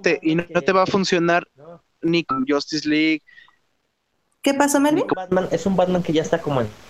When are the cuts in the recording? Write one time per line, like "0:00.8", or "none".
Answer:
none